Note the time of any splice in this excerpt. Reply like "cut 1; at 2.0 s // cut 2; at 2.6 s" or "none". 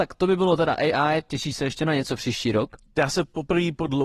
cut 1; at 1.3 s